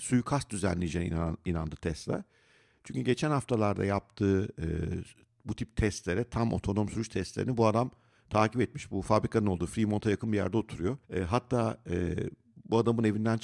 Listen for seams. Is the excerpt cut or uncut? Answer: cut